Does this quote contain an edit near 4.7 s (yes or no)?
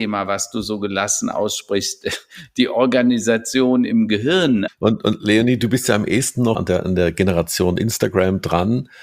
yes